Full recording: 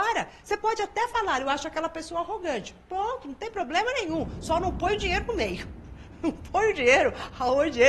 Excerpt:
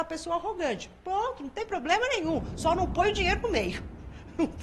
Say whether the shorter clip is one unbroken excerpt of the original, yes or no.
yes